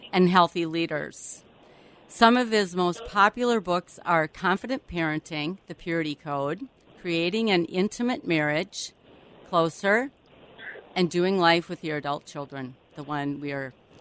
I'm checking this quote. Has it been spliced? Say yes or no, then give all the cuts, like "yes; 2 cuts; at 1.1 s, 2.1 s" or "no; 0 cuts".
no; 0 cuts